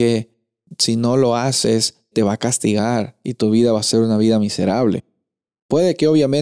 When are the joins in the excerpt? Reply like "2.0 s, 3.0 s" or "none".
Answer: 2.1 s

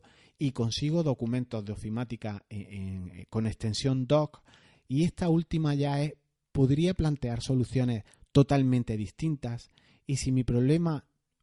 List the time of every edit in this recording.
4.7 s

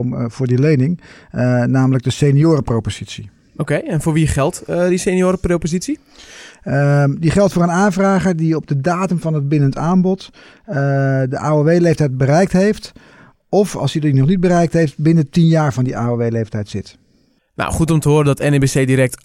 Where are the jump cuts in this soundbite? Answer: none

